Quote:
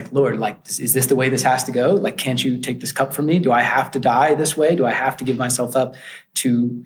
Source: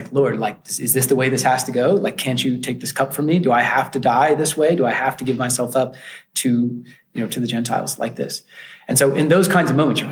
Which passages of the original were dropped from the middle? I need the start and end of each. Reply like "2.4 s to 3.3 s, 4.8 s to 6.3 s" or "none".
none